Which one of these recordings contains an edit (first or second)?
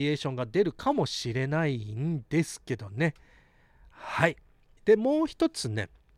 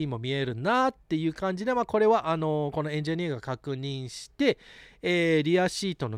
first